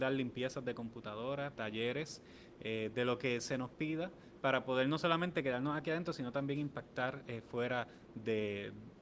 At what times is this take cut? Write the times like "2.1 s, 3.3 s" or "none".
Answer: 1.5 s